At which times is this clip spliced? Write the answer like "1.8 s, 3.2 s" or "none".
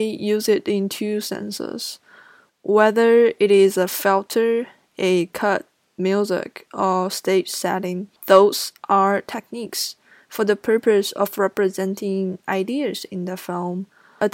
2.5 s